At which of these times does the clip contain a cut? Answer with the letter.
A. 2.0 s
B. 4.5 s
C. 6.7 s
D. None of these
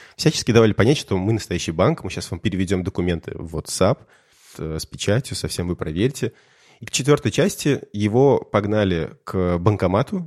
B